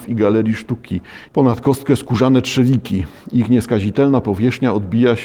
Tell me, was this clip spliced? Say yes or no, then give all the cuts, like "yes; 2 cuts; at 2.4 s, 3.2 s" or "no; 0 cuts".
yes; 1 cut; at 1.3 s